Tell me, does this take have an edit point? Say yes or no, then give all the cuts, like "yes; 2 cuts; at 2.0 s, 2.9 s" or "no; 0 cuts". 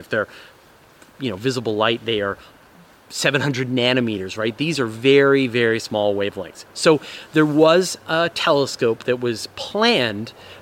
no; 0 cuts